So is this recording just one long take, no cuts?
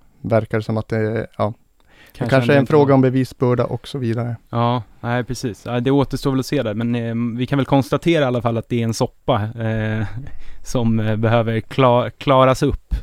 yes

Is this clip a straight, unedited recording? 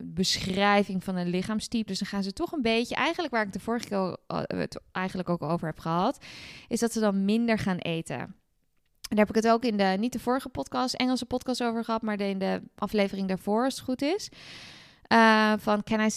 no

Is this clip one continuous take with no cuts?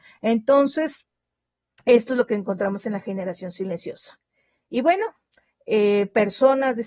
yes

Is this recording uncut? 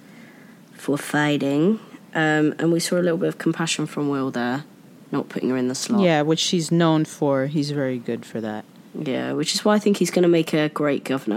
yes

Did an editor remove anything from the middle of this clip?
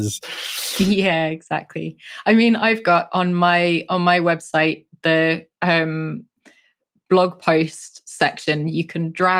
no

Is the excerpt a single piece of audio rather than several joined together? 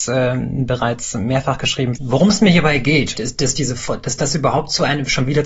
no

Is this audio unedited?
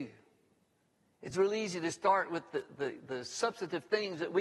yes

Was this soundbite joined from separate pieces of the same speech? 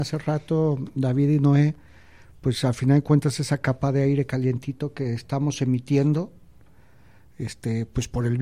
no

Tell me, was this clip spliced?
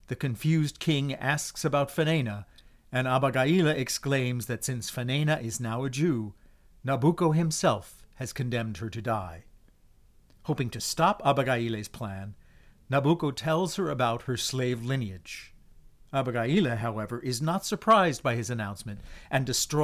no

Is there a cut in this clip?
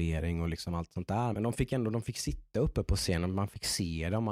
yes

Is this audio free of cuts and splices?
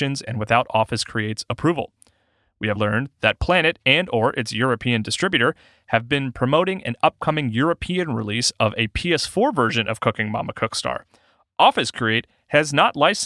no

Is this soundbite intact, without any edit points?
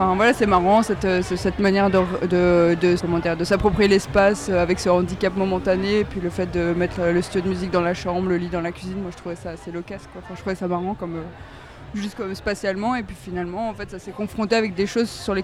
no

